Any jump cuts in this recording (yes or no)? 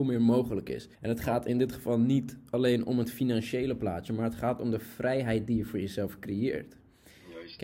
yes